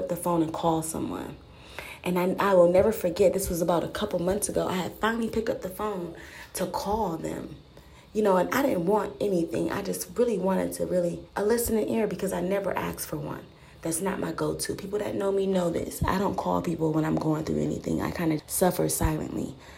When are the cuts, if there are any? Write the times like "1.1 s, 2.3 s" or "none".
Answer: 11.3 s, 18.4 s